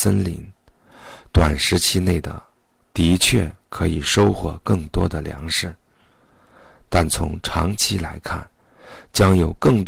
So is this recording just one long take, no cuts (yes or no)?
yes